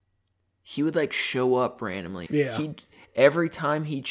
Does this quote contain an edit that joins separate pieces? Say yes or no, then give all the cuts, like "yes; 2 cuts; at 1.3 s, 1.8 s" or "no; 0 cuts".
yes; 1 cut; at 2.3 s